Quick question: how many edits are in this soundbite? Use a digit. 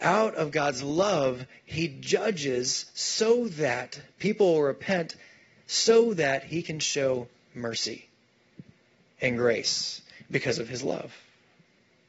0